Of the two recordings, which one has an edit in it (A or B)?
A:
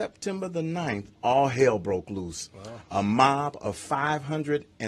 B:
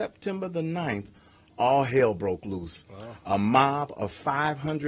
A